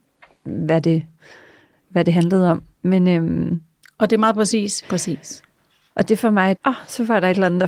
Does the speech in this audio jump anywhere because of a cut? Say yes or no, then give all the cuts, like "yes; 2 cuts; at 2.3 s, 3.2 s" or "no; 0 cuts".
yes; 2 cuts; at 4.8 s, 6.6 s